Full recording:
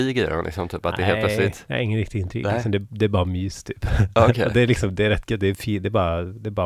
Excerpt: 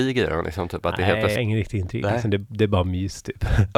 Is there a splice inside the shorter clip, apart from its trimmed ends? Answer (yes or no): yes